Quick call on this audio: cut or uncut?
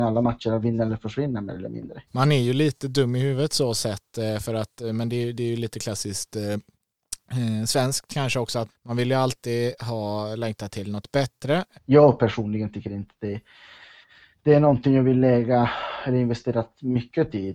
cut